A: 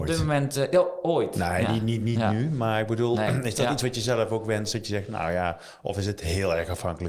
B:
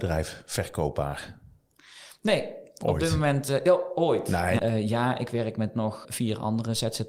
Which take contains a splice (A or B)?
B